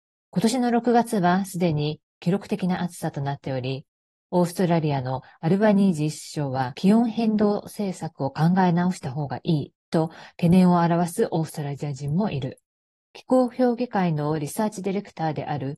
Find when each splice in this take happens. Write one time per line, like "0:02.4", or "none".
none